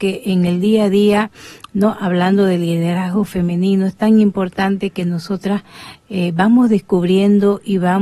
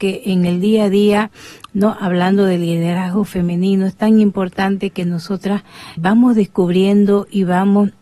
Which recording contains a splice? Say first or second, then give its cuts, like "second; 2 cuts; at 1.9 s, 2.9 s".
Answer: second; 1 cut; at 6.0 s